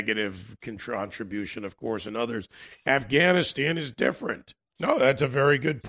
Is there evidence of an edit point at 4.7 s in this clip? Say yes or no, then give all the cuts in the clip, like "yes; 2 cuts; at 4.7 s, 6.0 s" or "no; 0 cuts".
yes; 1 cut; at 4.7 s